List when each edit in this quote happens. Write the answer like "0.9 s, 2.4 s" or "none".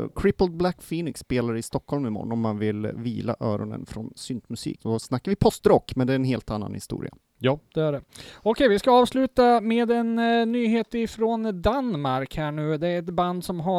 4.8 s